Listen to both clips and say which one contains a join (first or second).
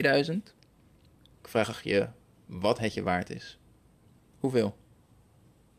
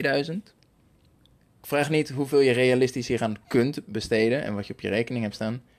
first